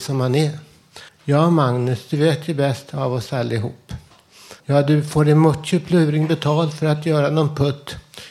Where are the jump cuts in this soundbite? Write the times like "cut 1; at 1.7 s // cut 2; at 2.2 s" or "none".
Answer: cut 1; at 1.1 s // cut 2; at 4.6 s